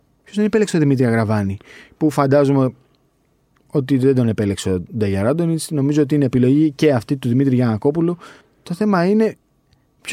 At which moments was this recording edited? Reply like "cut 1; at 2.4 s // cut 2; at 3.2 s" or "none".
cut 1; at 8.4 s